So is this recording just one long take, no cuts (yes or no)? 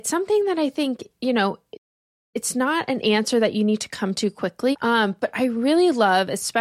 no